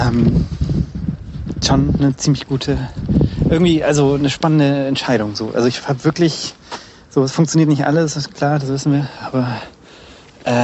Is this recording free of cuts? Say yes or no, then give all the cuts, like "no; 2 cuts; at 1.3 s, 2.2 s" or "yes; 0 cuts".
no; 1 cut; at 2.0 s